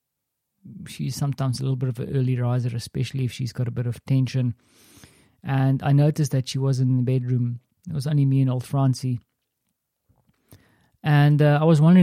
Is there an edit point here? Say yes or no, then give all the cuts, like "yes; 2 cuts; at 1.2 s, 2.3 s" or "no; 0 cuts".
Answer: no; 0 cuts